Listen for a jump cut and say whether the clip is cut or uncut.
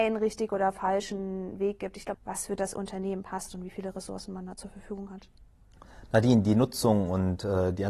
cut